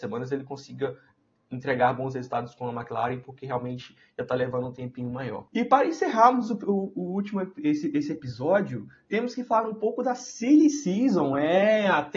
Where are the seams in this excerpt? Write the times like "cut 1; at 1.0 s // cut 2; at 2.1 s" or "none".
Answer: cut 1; at 5.5 s